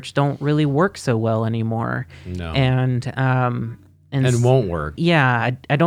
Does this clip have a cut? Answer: yes; 1 cut; at 5.0 s

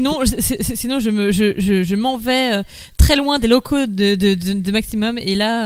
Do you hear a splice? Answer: no; 0 cuts

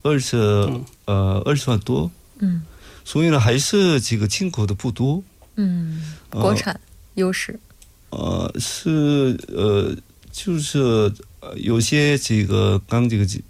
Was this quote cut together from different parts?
no; 0 cuts

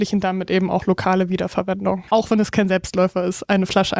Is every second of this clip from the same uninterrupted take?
no; 1 cut; at 2.1 s

